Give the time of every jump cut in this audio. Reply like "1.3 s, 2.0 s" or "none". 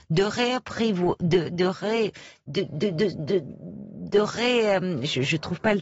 none